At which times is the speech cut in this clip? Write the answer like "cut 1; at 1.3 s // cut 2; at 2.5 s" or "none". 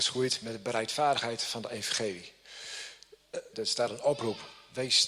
cut 1; at 3.5 s